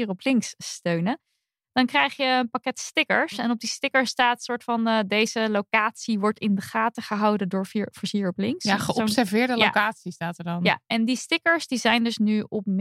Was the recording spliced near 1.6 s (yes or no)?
no